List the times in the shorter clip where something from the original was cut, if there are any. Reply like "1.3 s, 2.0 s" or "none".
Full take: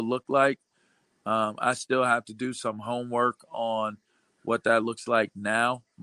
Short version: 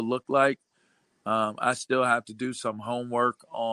none